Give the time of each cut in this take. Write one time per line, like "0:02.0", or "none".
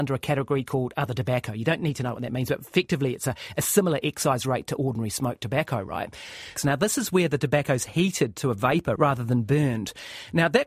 0:06.6
0:09.0

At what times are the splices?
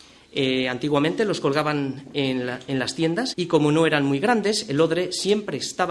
0:03.3

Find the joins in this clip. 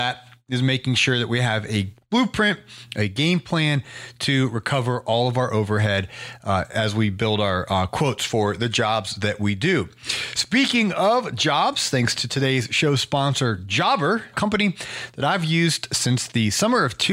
0:14.3

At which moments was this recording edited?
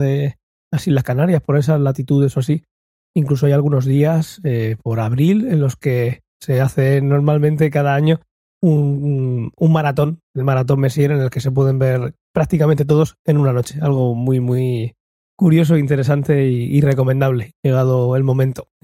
none

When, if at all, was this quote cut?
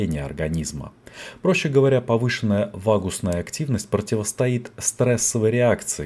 none

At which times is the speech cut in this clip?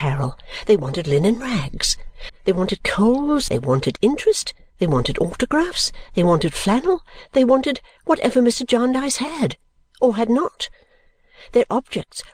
0:02.3
0:03.5

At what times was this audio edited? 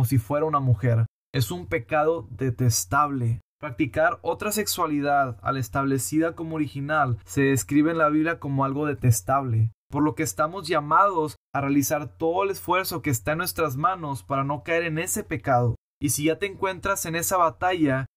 none

